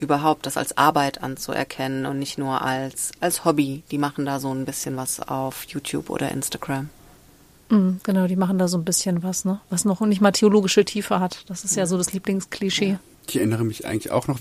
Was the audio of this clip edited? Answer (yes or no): no